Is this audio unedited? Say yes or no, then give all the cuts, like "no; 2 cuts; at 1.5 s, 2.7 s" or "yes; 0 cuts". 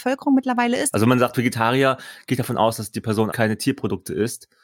no; 2 cuts; at 0.9 s, 3.3 s